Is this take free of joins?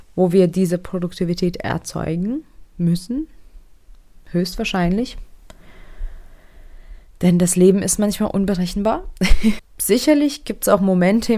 no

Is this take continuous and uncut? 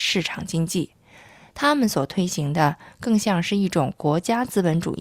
yes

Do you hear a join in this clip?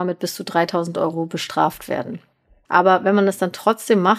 yes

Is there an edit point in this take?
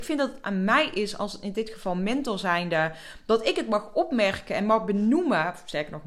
no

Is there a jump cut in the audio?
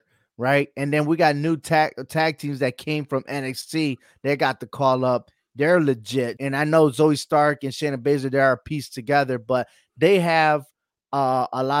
yes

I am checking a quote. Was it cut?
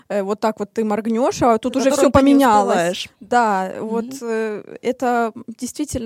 no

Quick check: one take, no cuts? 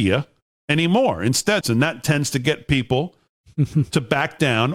no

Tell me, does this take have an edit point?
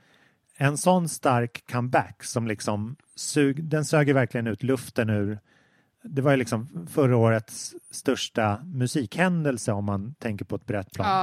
no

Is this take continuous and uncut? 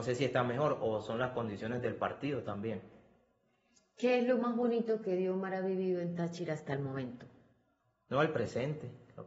yes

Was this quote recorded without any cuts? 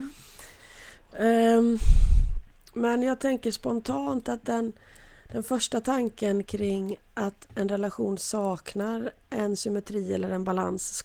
yes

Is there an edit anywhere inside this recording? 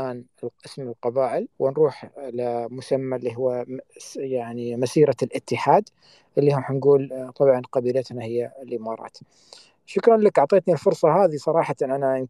yes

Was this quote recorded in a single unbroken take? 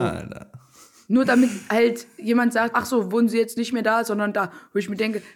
no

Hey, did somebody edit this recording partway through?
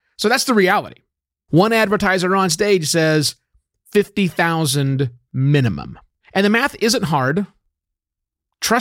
yes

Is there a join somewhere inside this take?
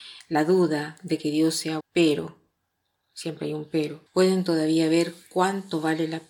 yes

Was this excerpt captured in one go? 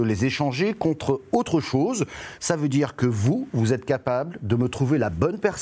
no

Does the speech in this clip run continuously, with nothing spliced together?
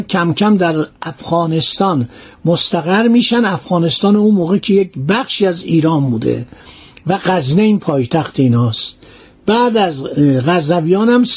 yes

